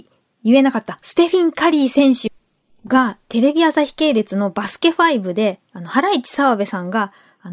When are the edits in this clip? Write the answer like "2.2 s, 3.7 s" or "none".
none